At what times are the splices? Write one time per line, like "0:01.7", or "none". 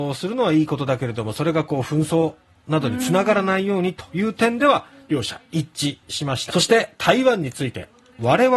0:06.5